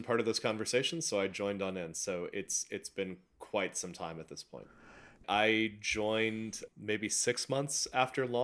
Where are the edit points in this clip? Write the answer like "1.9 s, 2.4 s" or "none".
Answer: 5.2 s, 6.7 s